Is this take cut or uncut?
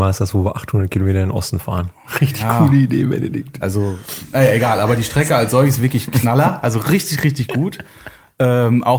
cut